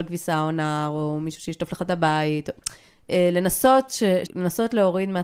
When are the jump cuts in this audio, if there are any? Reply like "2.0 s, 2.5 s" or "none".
4.3 s